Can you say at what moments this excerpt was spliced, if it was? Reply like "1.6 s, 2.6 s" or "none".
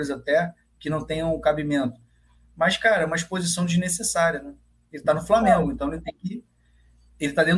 none